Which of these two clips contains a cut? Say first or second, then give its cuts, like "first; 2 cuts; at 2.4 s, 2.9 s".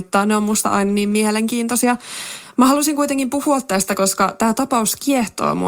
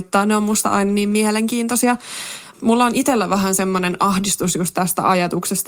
second; 1 cut; at 2.5 s